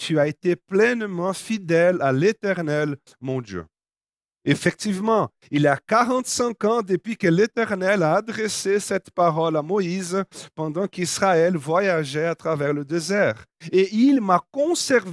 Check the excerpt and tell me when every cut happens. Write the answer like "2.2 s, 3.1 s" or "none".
none

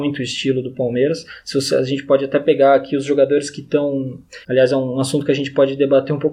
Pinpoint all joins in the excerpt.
1.4 s, 4.4 s

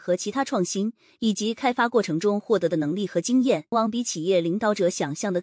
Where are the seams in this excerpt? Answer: 3.7 s

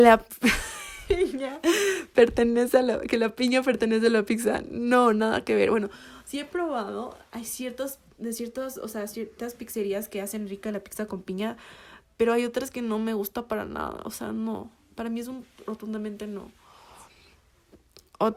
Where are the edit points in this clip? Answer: none

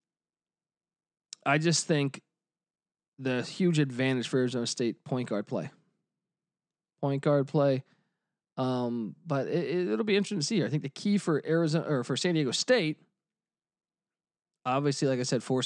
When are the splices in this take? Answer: none

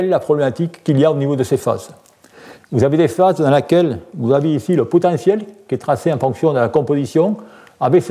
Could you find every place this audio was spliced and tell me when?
2.6 s

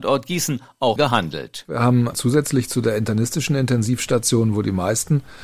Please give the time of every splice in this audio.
1.0 s

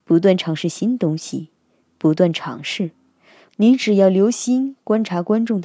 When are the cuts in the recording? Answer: 3.5 s

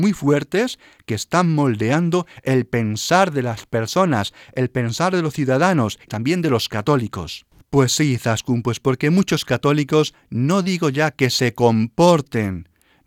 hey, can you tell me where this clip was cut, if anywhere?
7.6 s

